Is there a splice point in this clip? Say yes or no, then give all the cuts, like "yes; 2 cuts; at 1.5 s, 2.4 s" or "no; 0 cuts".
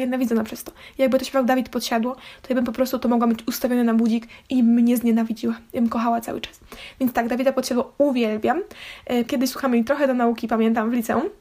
yes; 1 cut; at 9.3 s